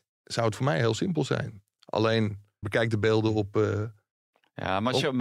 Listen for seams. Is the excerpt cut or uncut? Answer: cut